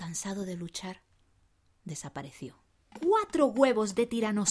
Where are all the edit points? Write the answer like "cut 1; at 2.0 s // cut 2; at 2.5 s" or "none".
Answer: cut 1; at 2.9 s